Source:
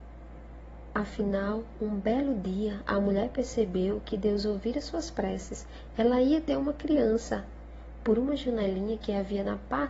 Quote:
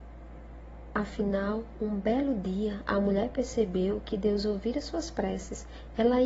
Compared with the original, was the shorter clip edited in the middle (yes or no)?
no